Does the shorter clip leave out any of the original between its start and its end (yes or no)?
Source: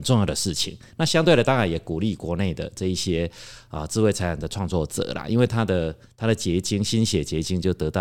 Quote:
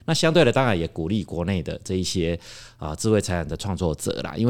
no